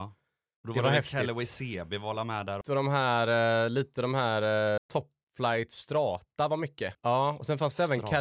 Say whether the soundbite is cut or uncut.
cut